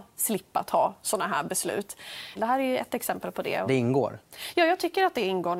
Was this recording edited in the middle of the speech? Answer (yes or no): yes